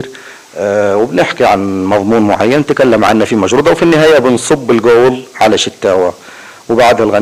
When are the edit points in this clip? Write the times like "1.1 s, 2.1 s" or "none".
none